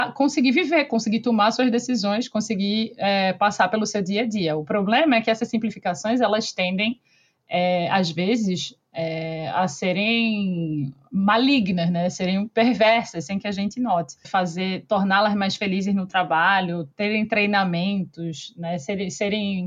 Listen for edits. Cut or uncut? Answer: cut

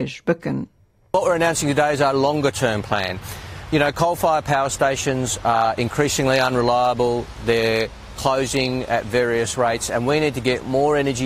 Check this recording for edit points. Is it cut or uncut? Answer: uncut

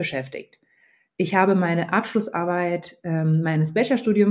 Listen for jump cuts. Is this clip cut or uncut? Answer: uncut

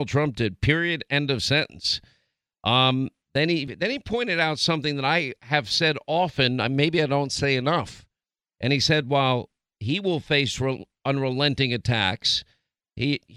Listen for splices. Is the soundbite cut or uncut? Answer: uncut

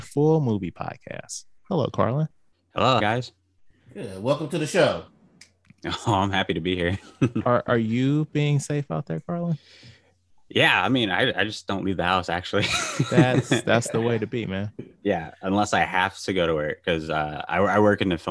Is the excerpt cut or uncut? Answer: cut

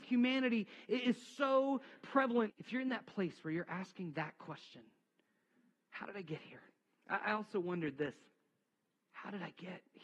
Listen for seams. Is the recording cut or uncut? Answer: cut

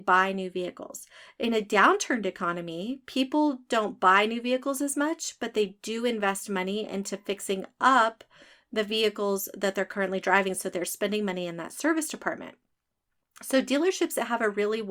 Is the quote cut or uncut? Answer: uncut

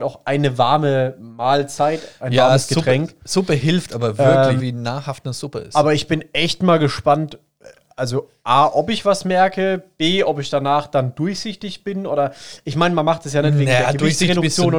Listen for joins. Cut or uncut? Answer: cut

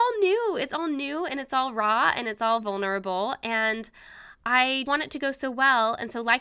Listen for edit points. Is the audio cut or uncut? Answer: cut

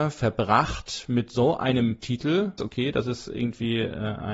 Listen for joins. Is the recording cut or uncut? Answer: cut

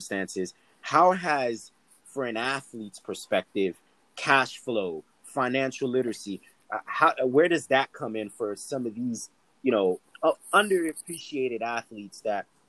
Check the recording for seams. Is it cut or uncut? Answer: uncut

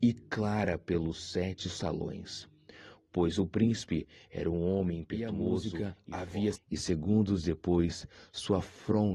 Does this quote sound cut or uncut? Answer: cut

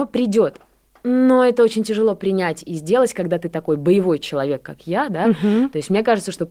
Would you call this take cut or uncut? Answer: uncut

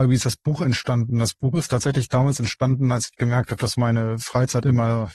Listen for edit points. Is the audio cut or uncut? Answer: uncut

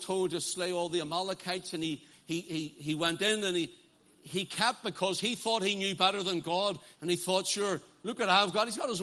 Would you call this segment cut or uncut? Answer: cut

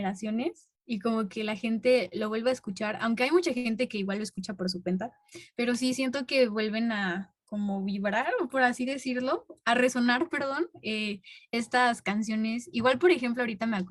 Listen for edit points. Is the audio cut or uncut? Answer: uncut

